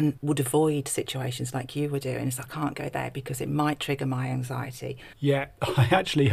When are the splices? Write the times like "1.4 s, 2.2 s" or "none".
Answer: 2.4 s, 5.1 s